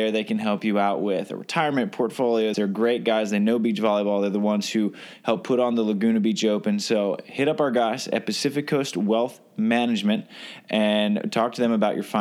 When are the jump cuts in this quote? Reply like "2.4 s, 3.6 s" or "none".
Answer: 2.5 s